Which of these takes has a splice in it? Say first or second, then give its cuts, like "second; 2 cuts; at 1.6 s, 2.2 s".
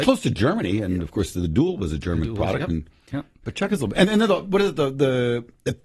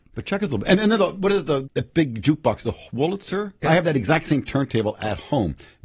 second; 2 cuts; at 1.6 s, 3.6 s